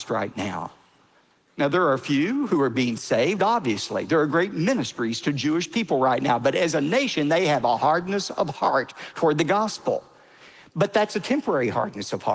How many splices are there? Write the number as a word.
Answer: zero